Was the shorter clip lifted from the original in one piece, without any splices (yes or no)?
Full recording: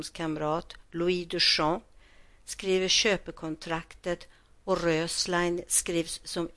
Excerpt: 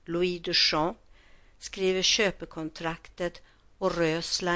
yes